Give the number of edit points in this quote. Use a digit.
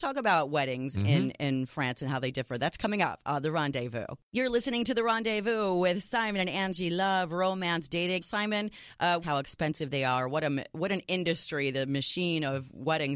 3